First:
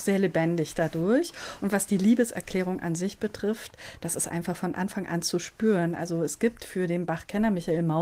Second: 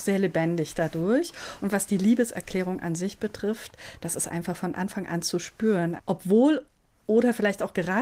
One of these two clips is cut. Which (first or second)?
second